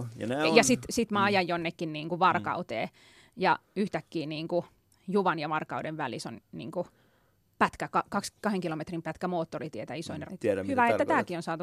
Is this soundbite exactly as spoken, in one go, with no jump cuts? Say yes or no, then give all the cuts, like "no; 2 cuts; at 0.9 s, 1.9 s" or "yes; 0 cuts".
no; 1 cut; at 10.3 s